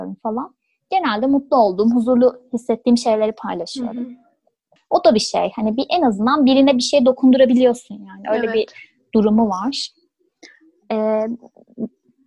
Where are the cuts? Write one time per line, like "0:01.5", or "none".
0:04.8